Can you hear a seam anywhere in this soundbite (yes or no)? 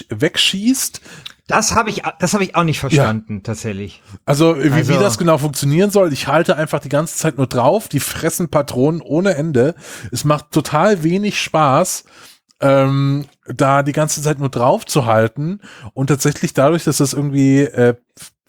no